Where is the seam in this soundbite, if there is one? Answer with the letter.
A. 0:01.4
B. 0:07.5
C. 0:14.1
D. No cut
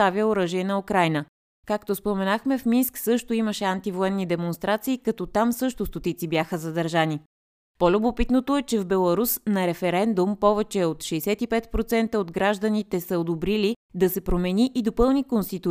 A